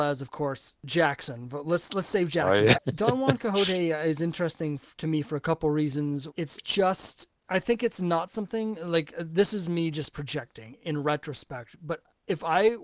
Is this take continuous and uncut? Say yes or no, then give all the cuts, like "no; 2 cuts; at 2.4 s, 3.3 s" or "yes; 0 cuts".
no; 2 cuts; at 2.7 s, 6.3 s